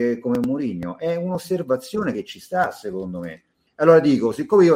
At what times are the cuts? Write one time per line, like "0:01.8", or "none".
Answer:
0:03.7